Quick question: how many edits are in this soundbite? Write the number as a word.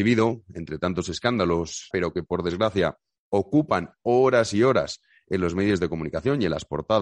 one